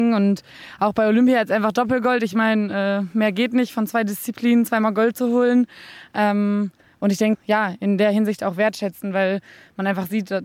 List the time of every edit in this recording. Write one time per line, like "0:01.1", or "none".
0:07.3